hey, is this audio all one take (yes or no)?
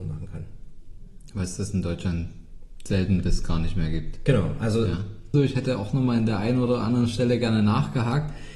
no